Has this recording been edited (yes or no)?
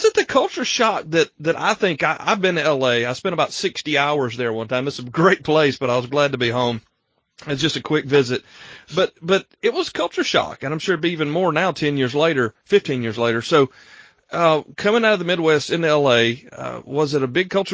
no